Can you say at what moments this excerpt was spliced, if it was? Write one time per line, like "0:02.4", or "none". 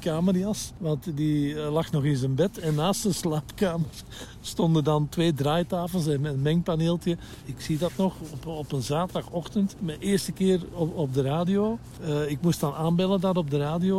0:07.4